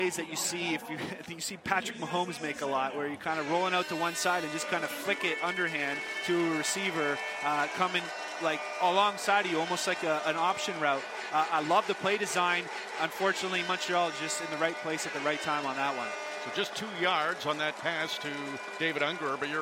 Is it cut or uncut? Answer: uncut